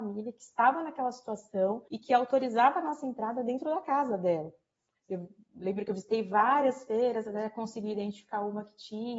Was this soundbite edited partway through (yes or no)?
yes